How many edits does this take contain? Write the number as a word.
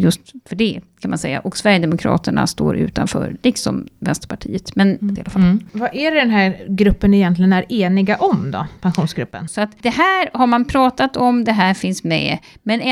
two